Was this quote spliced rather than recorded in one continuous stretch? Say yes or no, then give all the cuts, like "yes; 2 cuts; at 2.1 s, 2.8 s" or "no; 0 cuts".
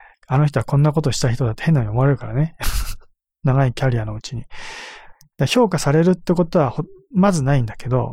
yes; 2 cuts; at 3.4 s, 5.3 s